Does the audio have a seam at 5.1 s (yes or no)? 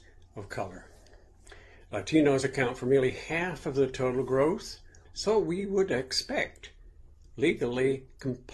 yes